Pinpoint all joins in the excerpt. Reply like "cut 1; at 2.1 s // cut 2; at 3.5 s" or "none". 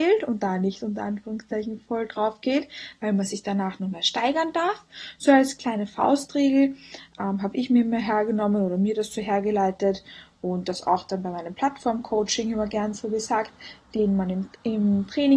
cut 1; at 13.8 s